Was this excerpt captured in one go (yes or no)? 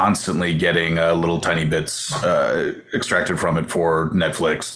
yes